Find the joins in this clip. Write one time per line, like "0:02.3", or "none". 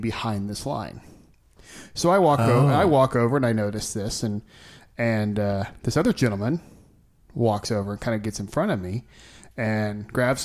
none